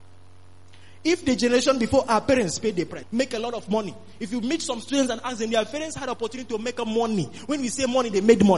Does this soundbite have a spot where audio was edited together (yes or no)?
yes